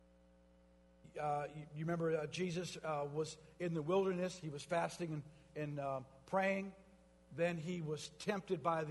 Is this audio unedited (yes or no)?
yes